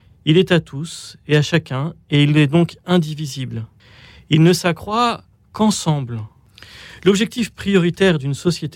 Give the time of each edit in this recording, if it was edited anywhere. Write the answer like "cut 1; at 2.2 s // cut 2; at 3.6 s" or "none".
none